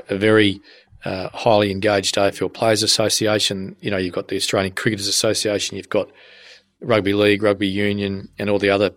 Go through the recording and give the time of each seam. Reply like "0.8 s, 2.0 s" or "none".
none